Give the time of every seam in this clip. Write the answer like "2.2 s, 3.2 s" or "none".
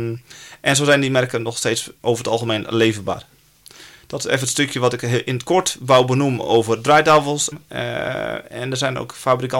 7.5 s